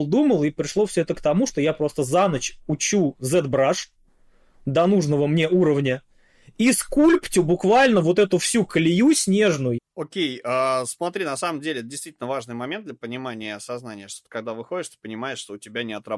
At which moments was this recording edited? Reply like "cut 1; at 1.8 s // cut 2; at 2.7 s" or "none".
cut 1; at 9.8 s

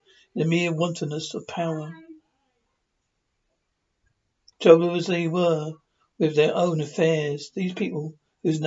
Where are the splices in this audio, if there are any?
cut 1; at 4.5 s

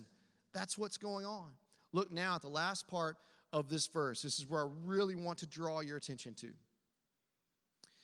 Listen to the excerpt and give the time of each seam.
none

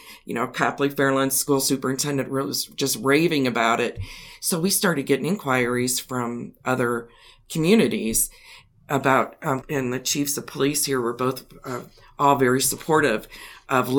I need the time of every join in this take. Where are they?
cut 1; at 9.6 s

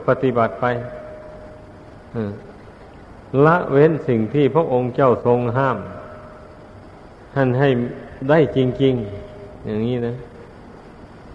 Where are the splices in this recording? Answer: none

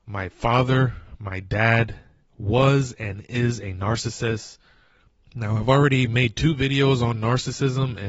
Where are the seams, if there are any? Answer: cut 1; at 5.3 s

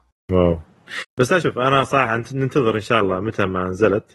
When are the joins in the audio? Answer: cut 1; at 1.4 s

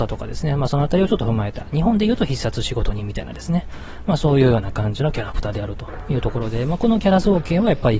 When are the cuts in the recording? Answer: none

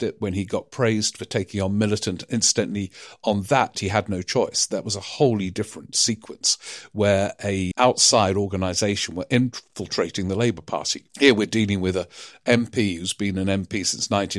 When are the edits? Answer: cut 1; at 7.7 s // cut 2; at 11.1 s

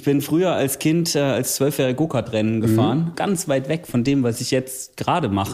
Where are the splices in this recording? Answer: cut 1; at 3.1 s

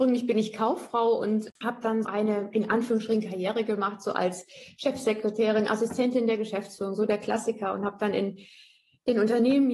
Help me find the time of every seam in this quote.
cut 1; at 2.0 s

